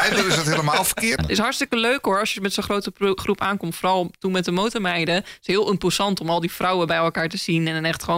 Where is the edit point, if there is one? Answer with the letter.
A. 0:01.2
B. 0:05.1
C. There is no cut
A